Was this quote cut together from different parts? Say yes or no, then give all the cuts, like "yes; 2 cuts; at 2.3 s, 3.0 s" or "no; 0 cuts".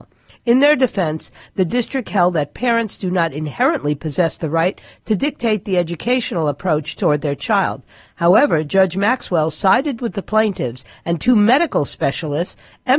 no; 0 cuts